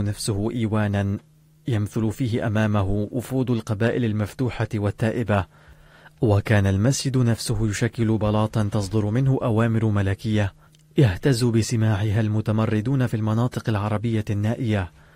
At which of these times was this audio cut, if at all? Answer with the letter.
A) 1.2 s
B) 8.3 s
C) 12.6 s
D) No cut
D